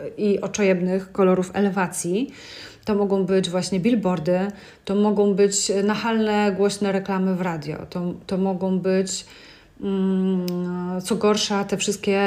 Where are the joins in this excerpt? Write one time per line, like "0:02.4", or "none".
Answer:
none